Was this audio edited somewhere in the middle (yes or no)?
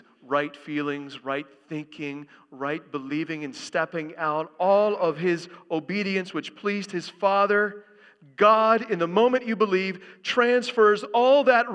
no